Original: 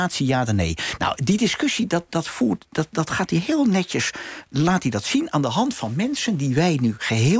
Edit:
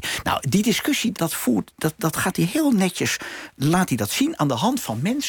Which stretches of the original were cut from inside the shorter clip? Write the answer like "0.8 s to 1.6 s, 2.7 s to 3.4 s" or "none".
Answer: 1.9 s to 2.1 s